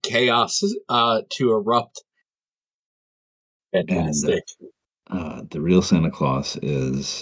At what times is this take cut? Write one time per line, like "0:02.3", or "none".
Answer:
0:03.6